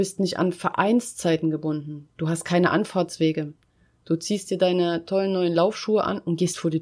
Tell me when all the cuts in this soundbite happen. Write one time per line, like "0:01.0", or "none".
none

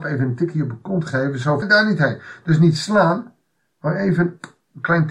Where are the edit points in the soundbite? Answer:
0:01.6

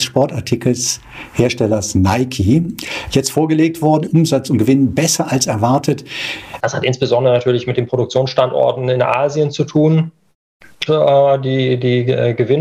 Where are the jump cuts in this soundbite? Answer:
0:04.1
0:06.6
0:10.9

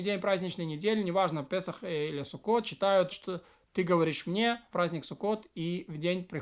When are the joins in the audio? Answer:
0:03.1
0:04.7

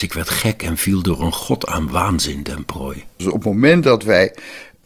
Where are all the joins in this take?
0:03.2

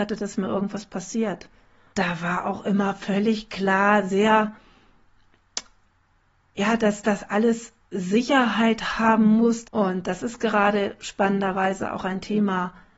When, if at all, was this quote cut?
0:01.9
0:09.6

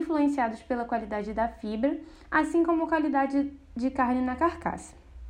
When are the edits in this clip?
none

